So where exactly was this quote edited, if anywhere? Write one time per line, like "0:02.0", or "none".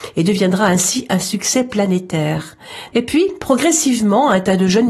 0:02.9